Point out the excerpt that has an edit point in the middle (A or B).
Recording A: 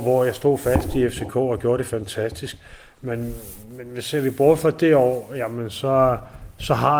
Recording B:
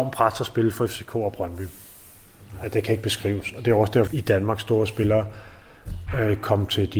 B